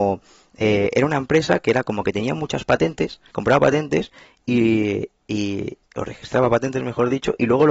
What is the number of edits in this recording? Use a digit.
1